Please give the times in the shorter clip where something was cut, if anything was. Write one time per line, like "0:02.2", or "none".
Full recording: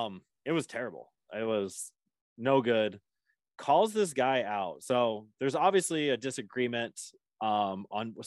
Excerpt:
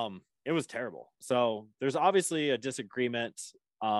0:01.2